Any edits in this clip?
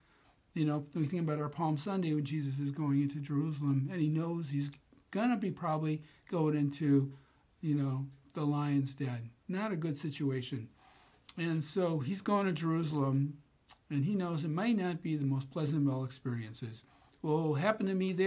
no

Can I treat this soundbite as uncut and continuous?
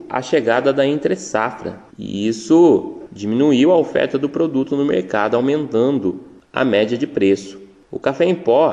yes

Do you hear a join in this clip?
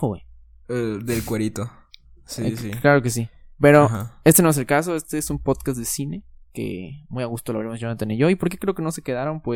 no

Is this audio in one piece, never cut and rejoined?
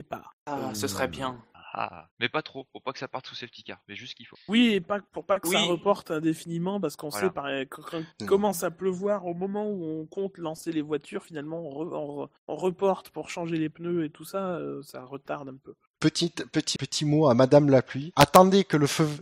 no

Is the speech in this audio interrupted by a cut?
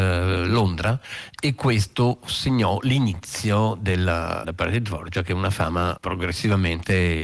yes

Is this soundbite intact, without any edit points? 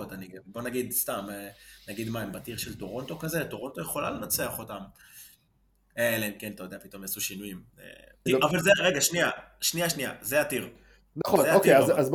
no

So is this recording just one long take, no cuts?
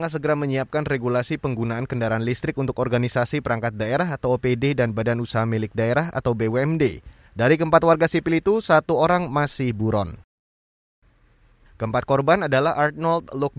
no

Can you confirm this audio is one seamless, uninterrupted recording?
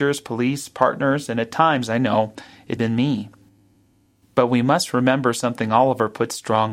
no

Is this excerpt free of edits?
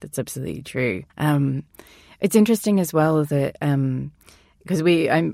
no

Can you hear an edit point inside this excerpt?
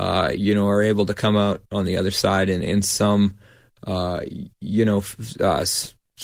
no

